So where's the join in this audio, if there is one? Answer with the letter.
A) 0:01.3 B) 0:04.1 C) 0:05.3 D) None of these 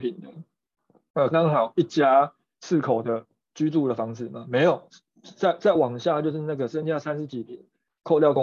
A